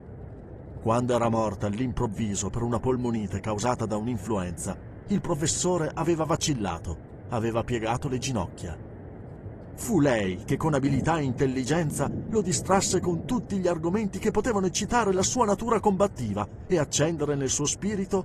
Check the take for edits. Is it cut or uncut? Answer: cut